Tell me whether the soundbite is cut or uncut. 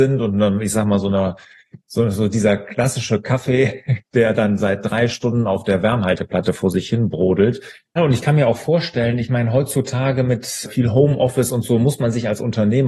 cut